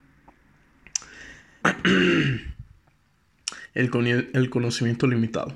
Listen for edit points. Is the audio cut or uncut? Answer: cut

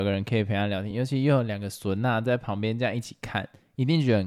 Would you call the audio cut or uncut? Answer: uncut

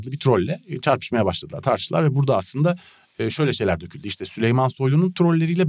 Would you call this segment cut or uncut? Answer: uncut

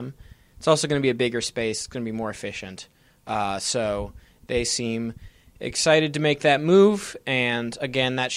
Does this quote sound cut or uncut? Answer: uncut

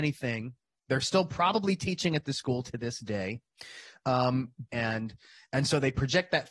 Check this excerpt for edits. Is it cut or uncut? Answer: cut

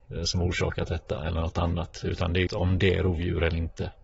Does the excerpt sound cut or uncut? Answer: cut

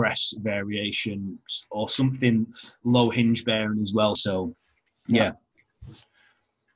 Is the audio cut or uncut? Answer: cut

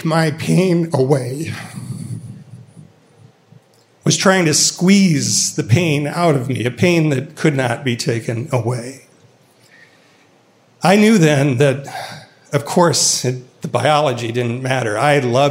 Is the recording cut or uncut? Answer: uncut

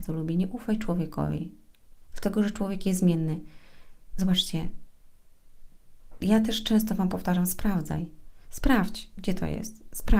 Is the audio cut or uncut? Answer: uncut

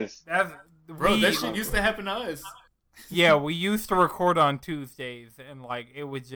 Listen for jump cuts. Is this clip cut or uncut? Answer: uncut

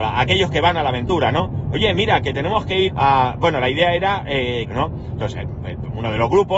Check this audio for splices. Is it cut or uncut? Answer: cut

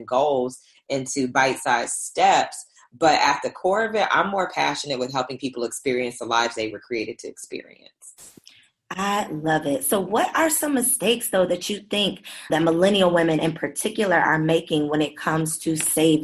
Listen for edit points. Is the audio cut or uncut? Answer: cut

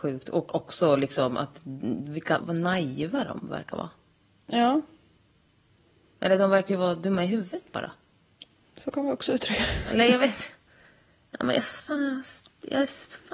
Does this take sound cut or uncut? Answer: cut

